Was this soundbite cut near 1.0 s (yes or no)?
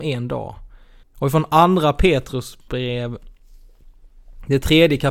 yes